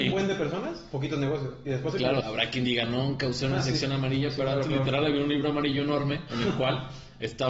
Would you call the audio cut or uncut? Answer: cut